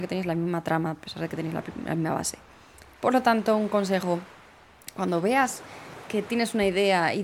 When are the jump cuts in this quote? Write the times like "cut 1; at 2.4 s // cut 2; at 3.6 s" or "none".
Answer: none